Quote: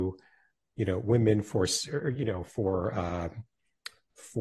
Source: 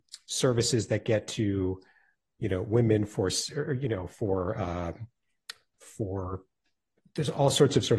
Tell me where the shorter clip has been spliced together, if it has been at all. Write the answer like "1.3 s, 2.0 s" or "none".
none